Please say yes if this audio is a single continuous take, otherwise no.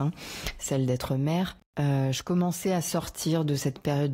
yes